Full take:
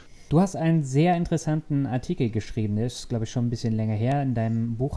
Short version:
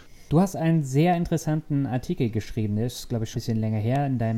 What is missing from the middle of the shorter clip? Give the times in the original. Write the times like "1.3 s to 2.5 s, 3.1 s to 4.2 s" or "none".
3.3 s to 3.5 s